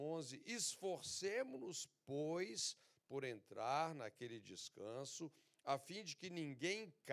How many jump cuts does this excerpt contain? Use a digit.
0